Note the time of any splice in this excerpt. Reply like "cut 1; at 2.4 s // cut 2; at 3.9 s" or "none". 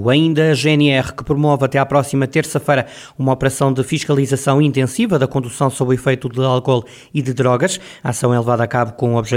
none